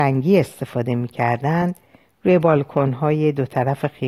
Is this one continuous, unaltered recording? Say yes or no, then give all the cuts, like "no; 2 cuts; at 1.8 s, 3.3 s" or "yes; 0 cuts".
yes; 0 cuts